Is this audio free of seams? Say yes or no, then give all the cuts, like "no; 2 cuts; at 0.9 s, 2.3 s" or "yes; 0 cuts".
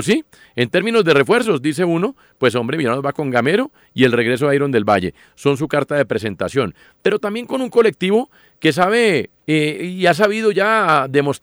no; 1 cut; at 9.4 s